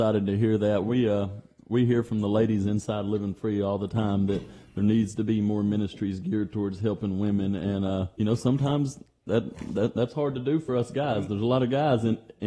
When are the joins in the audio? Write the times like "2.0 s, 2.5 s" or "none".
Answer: 8.1 s